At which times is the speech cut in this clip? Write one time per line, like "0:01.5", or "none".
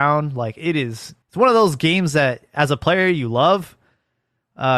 0:01.2